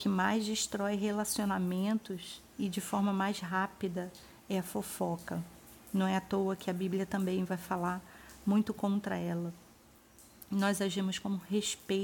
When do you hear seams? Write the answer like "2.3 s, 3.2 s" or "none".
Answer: none